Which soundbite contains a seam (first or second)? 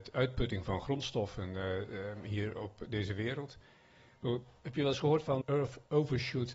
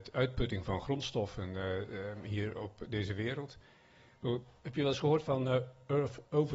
first